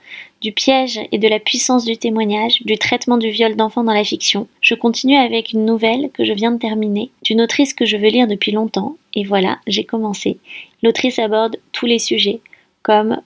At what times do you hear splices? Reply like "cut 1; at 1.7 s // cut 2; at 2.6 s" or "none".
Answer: cut 1; at 4.6 s // cut 2; at 10.7 s

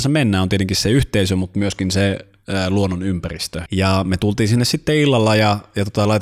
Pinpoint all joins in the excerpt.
cut 1; at 3.7 s

